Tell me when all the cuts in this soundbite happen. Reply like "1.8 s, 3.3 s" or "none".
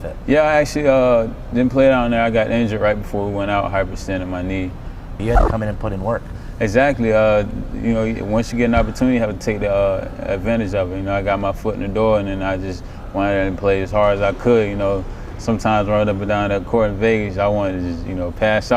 5.2 s